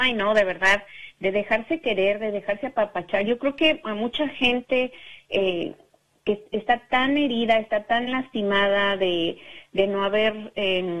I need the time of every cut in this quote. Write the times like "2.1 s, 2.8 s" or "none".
none